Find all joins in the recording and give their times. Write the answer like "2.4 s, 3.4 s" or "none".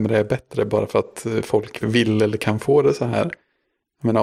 1.8 s